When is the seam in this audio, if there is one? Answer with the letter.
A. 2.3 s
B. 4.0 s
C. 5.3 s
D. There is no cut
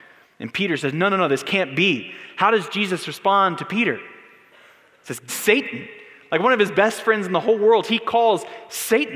C